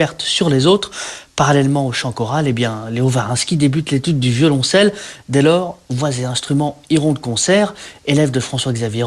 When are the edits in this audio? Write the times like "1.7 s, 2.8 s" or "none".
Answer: none